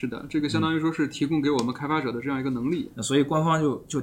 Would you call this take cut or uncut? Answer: cut